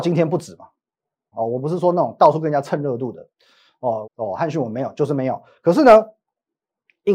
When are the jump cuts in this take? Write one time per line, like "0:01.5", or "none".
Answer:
0:01.3
0:04.0